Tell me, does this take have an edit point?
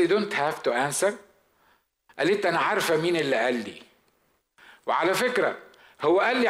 no; 0 cuts

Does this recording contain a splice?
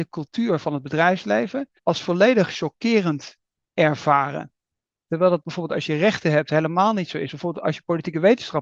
yes; 1 cut; at 1.8 s

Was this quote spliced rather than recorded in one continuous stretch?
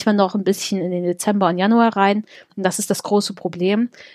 no; 0 cuts

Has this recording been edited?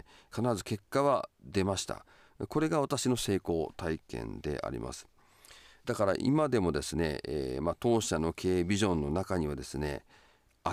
no; 0 cuts

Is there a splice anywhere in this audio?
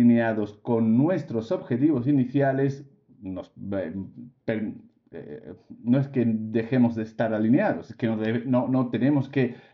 no; 0 cuts

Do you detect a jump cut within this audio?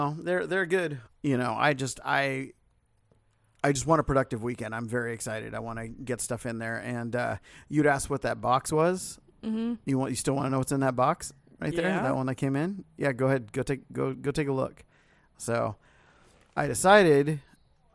no; 0 cuts

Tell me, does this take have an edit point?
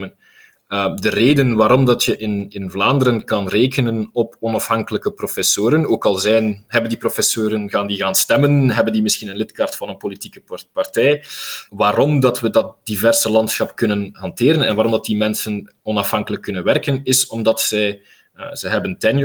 yes; 1 cut; at 11.7 s

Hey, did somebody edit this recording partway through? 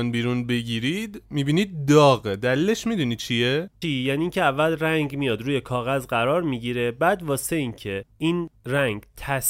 yes; 1 cut; at 3.8 s

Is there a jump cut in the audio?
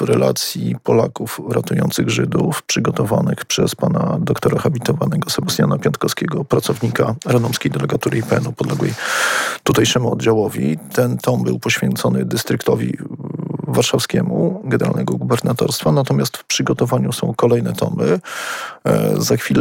no; 0 cuts

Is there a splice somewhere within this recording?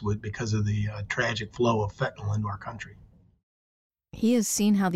no; 0 cuts

